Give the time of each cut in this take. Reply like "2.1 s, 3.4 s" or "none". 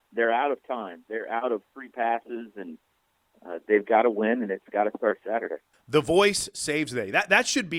none